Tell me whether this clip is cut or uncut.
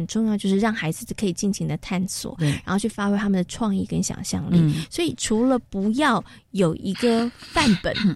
uncut